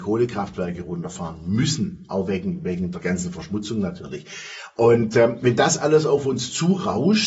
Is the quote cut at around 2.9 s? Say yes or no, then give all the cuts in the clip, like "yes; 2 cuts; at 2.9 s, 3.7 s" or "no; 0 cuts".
yes; 1 cut; at 2.9 s